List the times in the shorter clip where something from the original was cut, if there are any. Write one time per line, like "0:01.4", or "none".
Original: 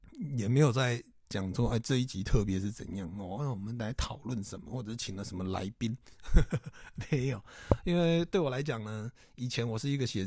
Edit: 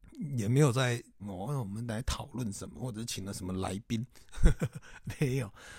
0:01.2